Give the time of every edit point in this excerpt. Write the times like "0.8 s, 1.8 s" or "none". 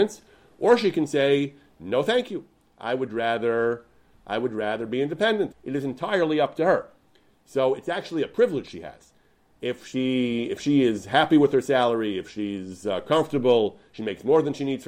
5.5 s